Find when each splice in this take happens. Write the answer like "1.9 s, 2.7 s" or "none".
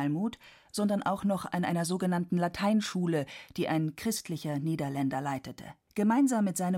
5.9 s